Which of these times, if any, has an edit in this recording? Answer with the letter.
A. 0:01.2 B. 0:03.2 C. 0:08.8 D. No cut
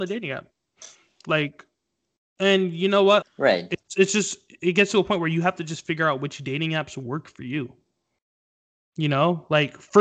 B